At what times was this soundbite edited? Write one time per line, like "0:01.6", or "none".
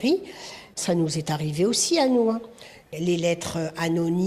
0:02.9